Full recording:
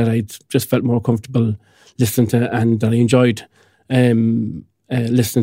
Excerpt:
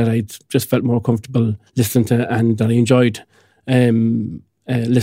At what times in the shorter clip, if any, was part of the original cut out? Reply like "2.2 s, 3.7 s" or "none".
1.7 s